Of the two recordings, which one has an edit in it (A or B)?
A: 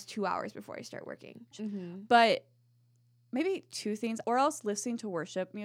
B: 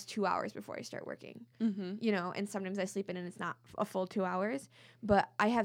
A